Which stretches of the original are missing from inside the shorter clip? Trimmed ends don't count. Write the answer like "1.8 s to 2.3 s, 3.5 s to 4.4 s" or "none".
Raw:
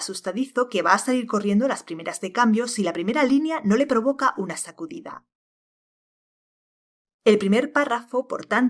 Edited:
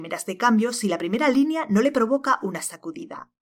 none